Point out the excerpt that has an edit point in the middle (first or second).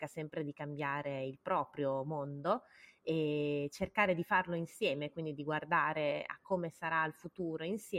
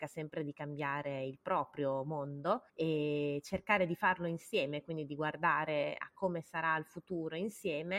second